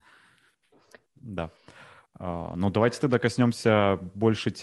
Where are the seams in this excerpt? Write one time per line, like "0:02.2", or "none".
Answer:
0:01.1